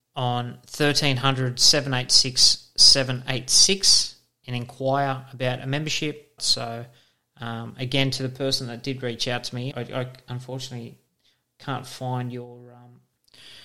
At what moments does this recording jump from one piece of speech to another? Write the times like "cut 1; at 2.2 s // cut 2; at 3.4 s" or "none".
cut 1; at 6.4 s // cut 2; at 9.7 s